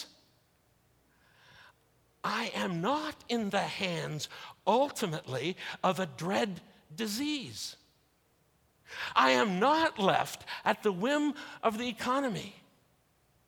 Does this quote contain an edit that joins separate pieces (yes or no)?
no